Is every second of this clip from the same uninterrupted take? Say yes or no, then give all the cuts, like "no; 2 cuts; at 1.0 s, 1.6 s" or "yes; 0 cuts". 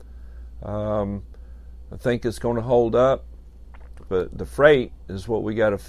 no; 1 cut; at 4.1 s